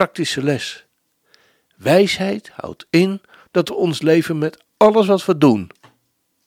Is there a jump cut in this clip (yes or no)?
no